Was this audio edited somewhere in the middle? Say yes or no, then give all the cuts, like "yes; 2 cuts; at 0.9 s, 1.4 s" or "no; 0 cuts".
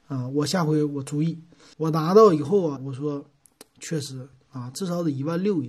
yes; 3 cuts; at 1.7 s, 2.8 s, 4.7 s